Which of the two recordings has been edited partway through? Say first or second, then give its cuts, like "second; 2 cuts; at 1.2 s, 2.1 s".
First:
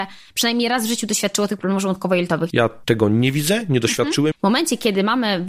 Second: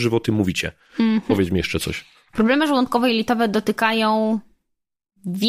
first; 2 cuts; at 2.5 s, 4.3 s